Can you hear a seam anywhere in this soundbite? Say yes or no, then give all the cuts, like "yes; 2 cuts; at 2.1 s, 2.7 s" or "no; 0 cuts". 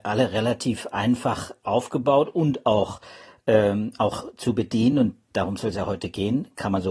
no; 0 cuts